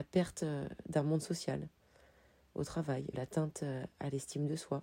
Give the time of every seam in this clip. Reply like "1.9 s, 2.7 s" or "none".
3.1 s